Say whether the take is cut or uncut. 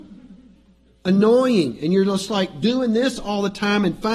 uncut